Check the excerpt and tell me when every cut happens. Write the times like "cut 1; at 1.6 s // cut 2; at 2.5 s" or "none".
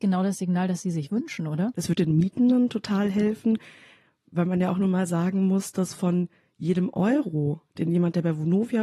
cut 1; at 1.7 s